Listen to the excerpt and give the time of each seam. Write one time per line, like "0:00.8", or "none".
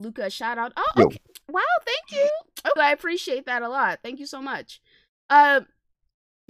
0:02.8

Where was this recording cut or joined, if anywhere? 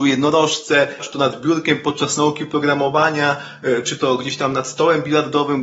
0:01.0

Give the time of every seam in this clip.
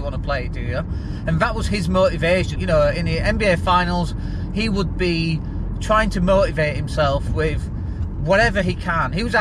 0:02.6

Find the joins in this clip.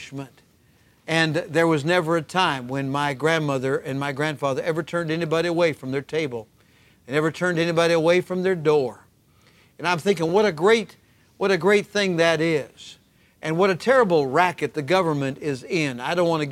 none

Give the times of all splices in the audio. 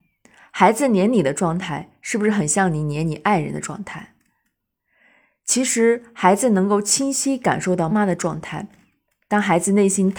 0:07.9

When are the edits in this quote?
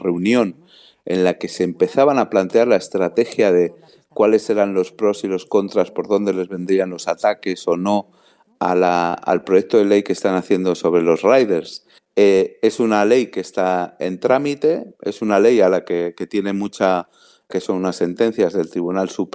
0:12.0
0:17.5

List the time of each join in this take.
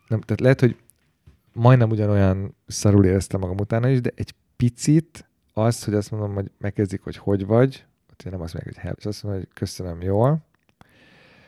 0:08.9

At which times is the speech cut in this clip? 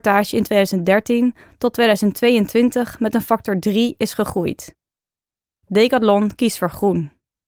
0:05.6

